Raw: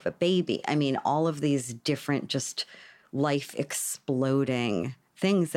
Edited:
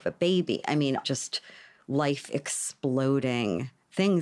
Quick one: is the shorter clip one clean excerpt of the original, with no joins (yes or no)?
no